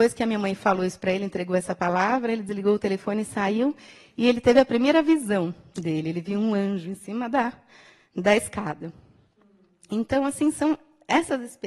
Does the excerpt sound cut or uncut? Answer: uncut